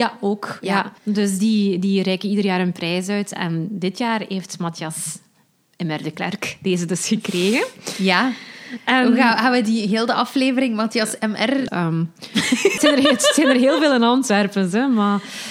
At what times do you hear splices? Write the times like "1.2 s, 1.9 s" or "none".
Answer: 1.0 s, 11.7 s, 12.8 s